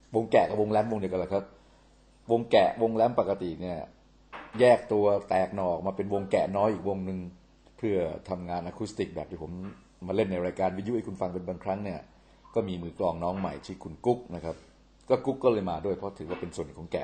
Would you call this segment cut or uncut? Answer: uncut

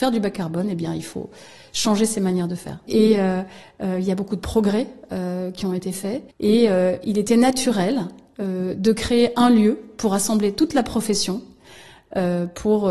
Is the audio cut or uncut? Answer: cut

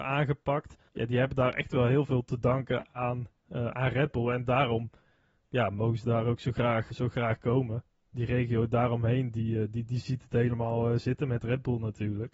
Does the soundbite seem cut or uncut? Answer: cut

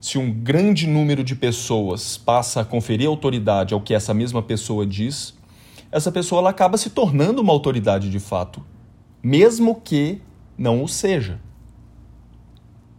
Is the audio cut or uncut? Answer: uncut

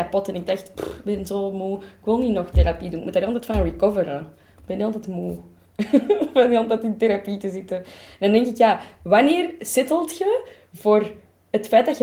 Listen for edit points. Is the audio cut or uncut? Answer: uncut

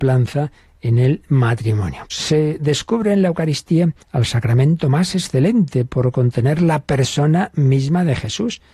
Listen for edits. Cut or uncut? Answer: cut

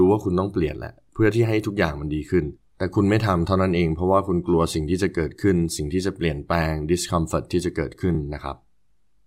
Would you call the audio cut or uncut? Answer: uncut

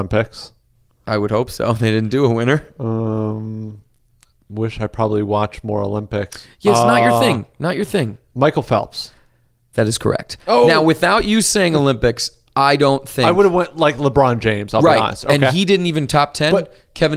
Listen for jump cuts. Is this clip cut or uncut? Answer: uncut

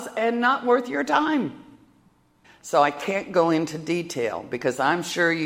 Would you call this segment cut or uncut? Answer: cut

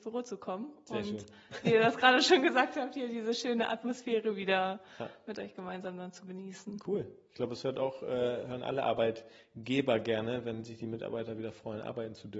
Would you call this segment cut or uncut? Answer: uncut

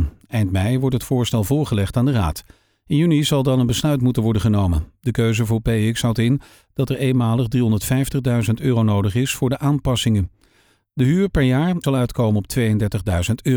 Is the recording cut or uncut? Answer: cut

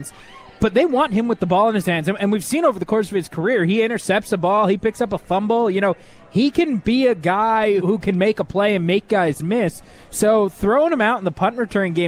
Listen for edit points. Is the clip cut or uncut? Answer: cut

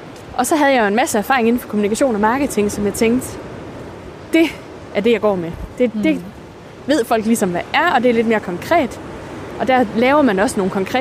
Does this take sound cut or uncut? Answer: uncut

